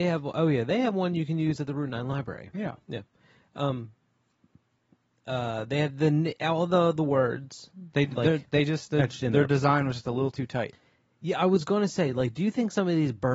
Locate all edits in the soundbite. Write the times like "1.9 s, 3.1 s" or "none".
none